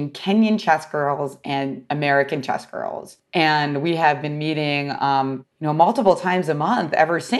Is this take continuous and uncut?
yes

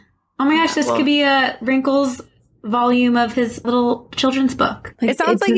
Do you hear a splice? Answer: yes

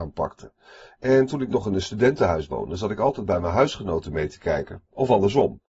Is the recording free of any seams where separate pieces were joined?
yes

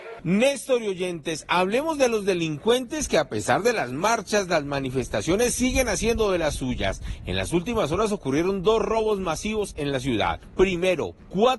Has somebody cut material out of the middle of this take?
no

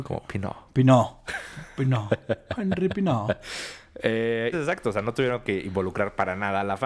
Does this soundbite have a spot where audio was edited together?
yes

